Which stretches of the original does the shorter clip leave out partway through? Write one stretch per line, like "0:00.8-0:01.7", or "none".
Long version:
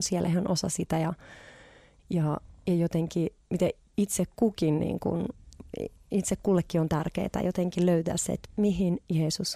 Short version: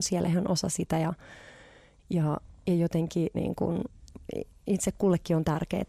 0:03.3-0:04.8

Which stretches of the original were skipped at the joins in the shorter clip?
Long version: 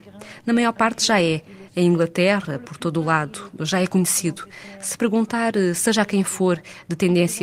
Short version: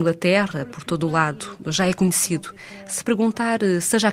none

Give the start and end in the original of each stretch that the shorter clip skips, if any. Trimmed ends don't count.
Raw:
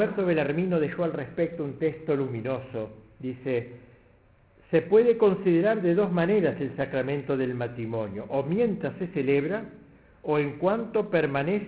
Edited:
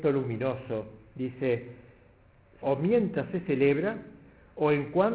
0:04.7-0:08.3

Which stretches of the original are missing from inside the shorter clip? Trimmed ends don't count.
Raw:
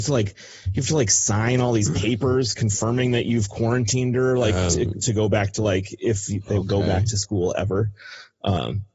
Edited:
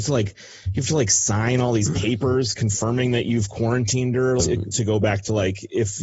0:04.4-0:04.7

